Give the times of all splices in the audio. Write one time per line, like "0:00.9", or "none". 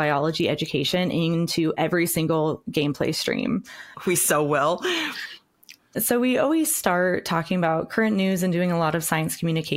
0:03.9
0:05.8